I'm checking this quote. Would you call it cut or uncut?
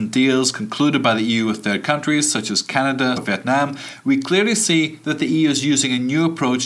cut